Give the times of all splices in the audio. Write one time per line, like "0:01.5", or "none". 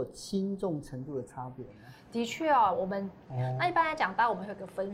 0:03.3